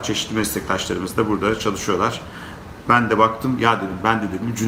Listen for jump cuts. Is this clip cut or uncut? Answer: uncut